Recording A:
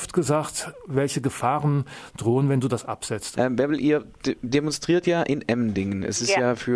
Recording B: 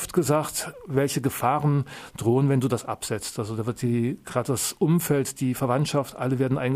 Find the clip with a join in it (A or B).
A